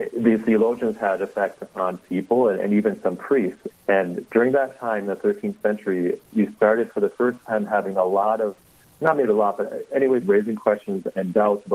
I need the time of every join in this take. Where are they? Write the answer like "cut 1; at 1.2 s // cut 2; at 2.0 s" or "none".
cut 1; at 3.7 s // cut 2; at 9.0 s // cut 3; at 10.2 s